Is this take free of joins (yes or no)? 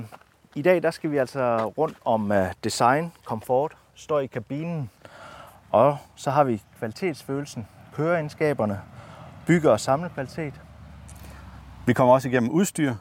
yes